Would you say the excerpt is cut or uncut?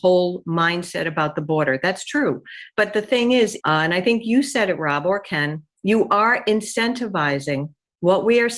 cut